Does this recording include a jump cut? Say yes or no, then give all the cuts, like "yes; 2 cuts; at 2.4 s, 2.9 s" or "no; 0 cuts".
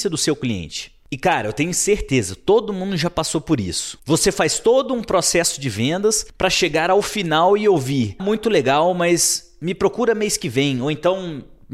yes; 1 cut; at 8.2 s